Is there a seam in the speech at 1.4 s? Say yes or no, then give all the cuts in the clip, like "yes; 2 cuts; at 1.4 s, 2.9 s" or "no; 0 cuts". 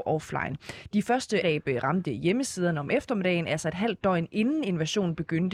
yes; 1 cut; at 1.4 s